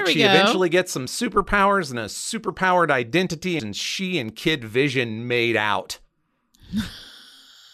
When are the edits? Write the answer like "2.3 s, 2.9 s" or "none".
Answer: 3.6 s